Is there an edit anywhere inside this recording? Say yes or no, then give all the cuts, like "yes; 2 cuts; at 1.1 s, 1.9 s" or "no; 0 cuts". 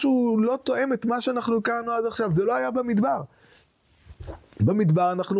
no; 0 cuts